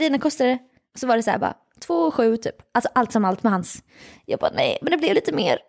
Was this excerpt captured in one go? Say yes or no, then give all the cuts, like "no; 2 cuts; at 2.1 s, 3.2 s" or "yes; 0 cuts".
yes; 0 cuts